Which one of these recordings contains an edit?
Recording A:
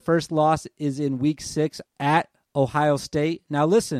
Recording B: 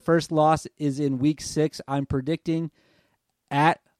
A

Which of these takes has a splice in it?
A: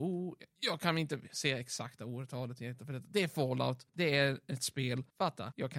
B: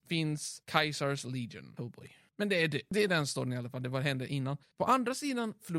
B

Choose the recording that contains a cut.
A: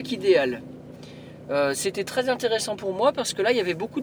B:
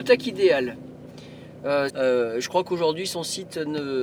B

